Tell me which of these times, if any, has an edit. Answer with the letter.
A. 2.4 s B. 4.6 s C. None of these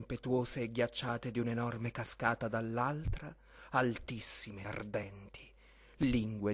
B